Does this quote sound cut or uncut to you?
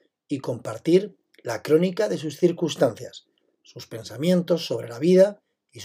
uncut